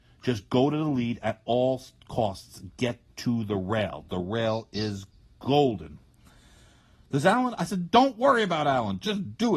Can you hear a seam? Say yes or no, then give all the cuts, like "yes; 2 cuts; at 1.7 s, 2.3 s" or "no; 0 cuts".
no; 0 cuts